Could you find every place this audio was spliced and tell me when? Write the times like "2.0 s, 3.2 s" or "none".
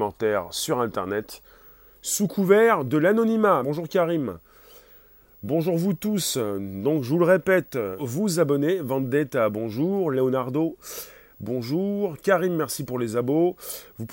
3.6 s, 8.0 s